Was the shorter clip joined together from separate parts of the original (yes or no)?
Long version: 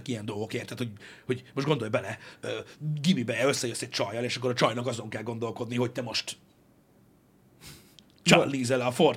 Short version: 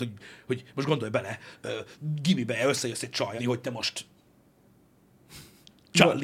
yes